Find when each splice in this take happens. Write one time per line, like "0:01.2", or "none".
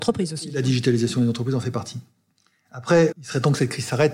0:03.1